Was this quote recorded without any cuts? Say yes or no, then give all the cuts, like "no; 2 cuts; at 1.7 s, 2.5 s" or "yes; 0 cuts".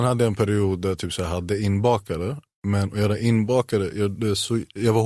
yes; 0 cuts